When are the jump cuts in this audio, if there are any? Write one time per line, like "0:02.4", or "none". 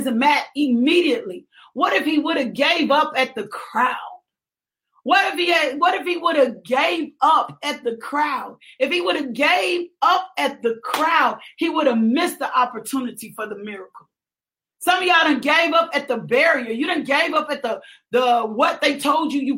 none